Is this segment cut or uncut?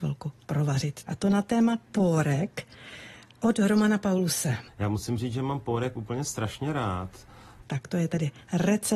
cut